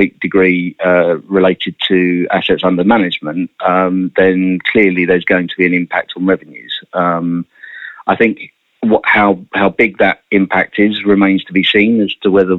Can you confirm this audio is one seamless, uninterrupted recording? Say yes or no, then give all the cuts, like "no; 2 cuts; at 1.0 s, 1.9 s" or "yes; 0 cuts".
yes; 0 cuts